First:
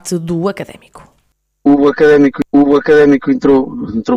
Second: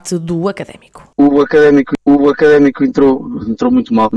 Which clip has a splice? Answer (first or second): second